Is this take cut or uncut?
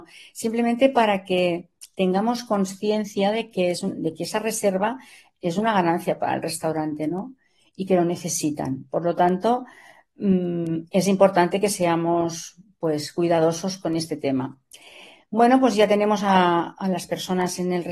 uncut